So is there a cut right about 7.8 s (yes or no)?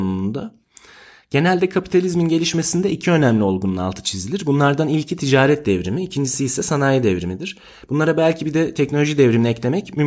no